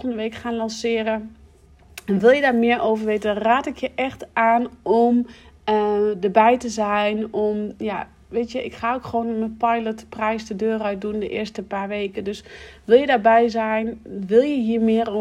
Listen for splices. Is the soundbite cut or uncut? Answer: uncut